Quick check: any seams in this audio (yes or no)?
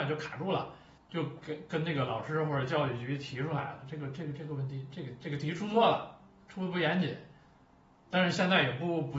yes